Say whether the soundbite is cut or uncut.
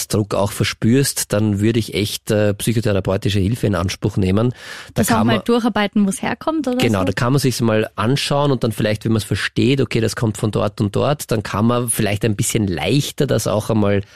uncut